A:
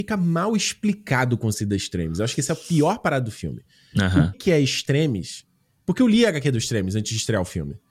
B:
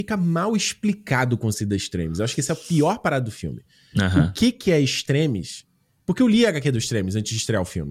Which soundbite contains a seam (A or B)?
A